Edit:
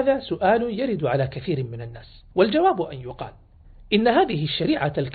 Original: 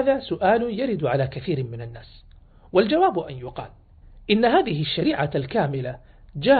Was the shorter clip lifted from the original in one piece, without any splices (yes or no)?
no